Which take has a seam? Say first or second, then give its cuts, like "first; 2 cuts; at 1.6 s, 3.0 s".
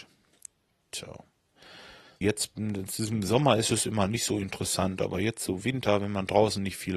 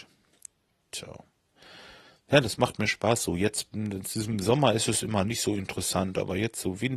first; 1 cut; at 2.2 s